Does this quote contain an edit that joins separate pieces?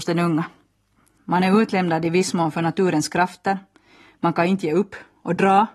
yes; 1 cut; at 1.2 s

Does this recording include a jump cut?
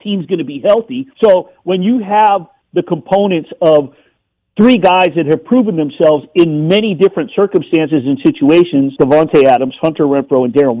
yes; 2 cuts; at 1.1 s, 9.0 s

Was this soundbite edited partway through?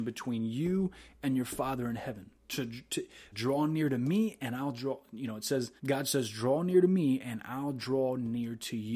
yes; 2 cuts; at 3.3 s, 5.8 s

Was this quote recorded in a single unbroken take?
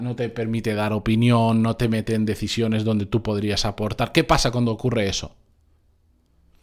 yes; 0 cuts

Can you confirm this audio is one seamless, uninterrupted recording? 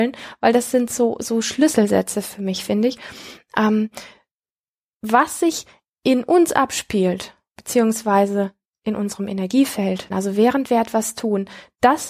no; 1 cut; at 10.1 s

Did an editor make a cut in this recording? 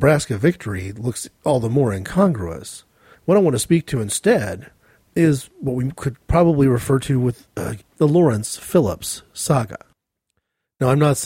yes; 2 cuts; at 3.1 s, 7.8 s

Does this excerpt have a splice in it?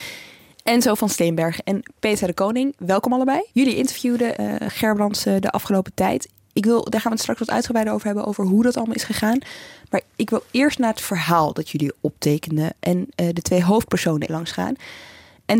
yes; 1 cut; at 14.3 s

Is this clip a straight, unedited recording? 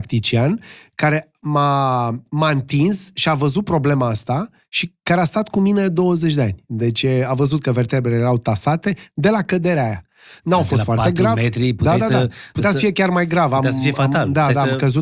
yes; 0 cuts

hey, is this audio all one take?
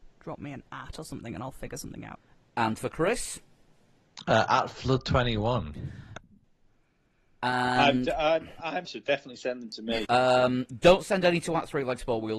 no; 2 cuts; at 8.9 s, 10.1 s

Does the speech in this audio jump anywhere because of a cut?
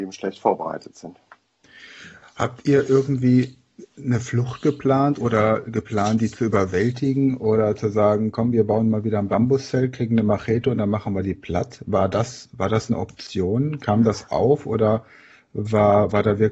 no; 0 cuts

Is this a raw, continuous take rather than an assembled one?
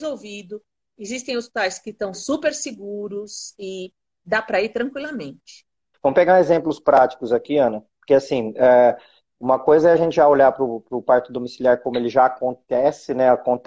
no; 1 cut; at 5.9 s

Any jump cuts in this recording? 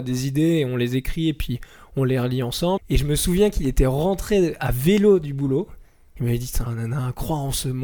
yes; 2 cuts; at 2.8 s, 6.7 s

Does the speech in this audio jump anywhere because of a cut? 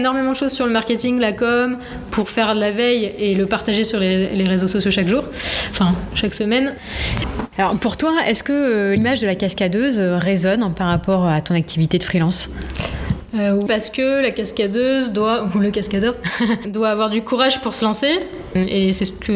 yes; 2 cuts; at 13.7 s, 16.6 s

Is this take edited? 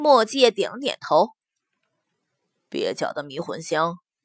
no; 0 cuts

